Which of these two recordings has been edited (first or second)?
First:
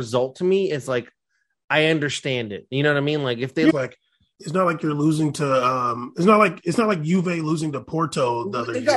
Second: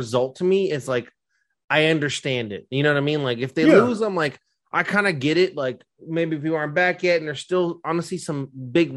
first